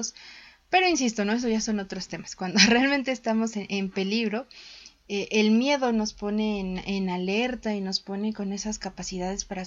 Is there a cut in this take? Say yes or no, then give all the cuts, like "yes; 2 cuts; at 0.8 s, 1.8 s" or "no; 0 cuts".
no; 0 cuts